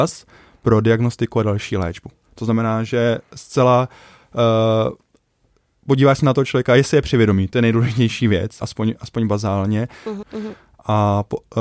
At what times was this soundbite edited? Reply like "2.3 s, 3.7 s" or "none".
8.6 s, 10.2 s